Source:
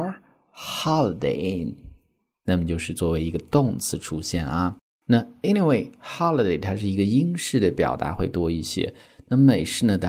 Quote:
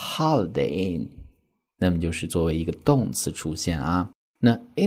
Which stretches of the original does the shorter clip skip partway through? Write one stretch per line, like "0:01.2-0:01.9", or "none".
none